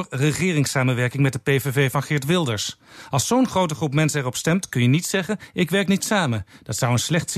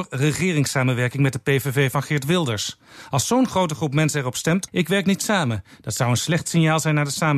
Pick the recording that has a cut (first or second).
second